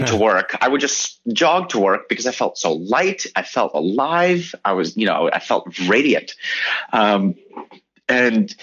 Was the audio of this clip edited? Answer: yes; 1 cut; at 3.7 s

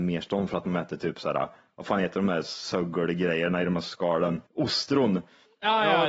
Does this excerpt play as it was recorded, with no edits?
no; 1 cut; at 4.5 s

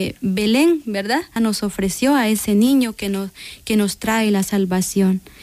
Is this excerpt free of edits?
no; 1 cut; at 1.4 s

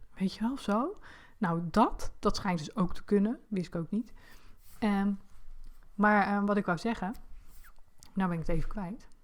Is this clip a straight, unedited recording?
yes; 0 cuts

